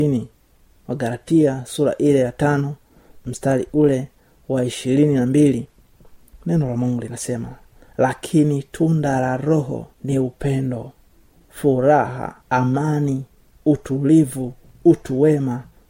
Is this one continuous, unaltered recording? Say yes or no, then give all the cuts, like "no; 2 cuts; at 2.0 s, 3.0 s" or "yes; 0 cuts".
no; 2 cuts; at 9.9 s, 12.4 s